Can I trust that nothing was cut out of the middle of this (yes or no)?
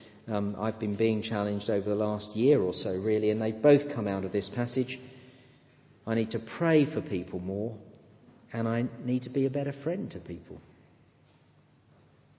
yes